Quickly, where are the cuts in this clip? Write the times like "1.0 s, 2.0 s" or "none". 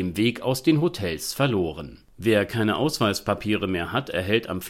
none